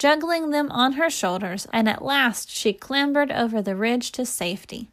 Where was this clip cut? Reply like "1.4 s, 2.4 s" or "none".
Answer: 1.7 s